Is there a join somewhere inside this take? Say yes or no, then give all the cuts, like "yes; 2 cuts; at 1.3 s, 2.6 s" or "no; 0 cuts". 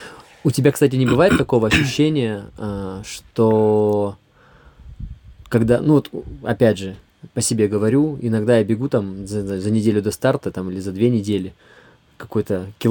no; 0 cuts